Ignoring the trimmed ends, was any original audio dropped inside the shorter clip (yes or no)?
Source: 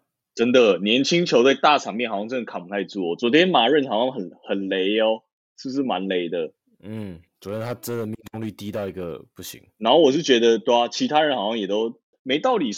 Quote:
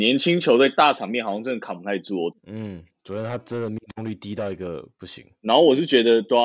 yes